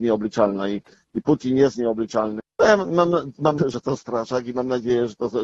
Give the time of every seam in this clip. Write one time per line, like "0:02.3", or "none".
0:02.4
0:03.6